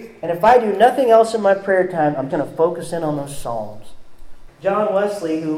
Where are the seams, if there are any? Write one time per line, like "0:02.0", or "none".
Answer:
0:02.3
0:04.5